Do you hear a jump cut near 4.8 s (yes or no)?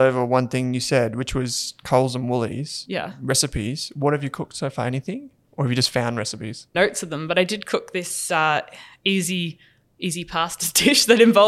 no